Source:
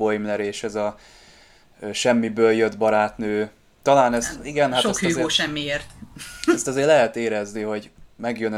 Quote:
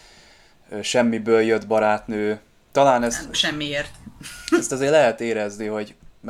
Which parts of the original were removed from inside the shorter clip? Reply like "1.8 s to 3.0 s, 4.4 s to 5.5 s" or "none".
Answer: 4.4 s to 5.3 s